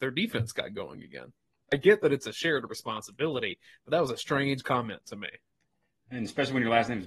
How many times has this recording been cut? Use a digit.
1